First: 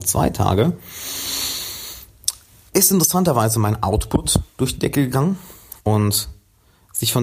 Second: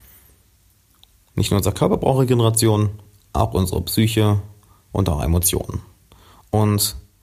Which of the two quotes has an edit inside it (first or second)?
first